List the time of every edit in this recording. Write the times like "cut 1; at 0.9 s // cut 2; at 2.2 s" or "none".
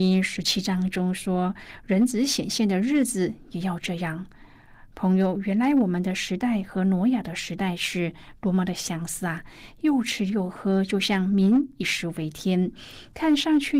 none

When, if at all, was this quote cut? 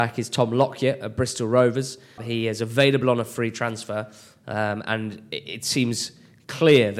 cut 1; at 2.2 s

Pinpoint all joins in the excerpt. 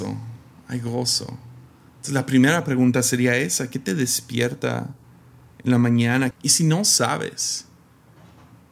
cut 1; at 6.3 s

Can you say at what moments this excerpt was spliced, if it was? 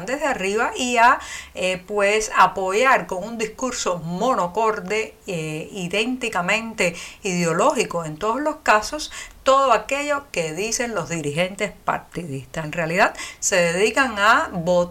cut 1; at 12.6 s

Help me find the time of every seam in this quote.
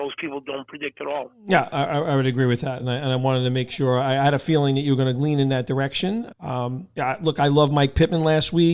cut 1; at 2.8 s // cut 2; at 6.3 s

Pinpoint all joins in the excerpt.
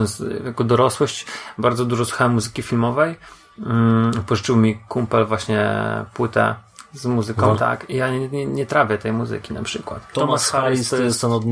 cut 1; at 7.5 s // cut 2; at 10.1 s

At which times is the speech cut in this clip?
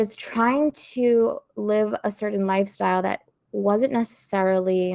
none

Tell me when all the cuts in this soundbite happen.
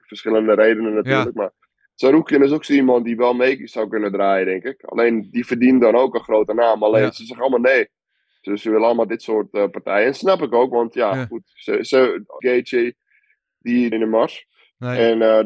cut 1; at 12.4 s // cut 2; at 13.9 s

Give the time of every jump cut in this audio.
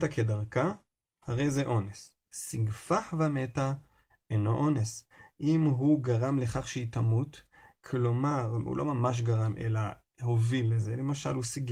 cut 1; at 2.3 s

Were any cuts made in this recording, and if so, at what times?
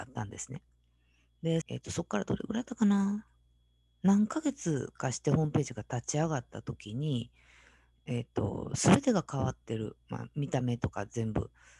cut 1; at 1.6 s

